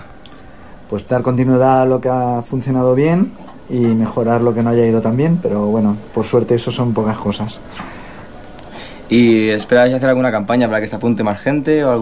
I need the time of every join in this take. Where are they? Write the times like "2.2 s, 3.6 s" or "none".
none